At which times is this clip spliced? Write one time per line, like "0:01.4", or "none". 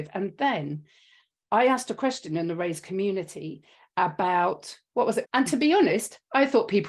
0:05.2